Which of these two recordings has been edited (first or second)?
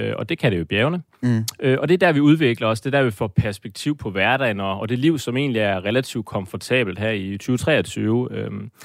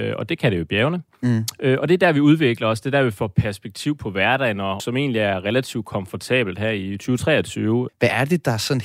second